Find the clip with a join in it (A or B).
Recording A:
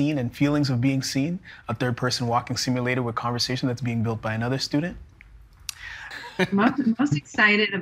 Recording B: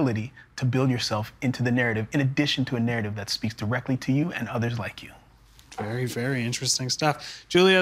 A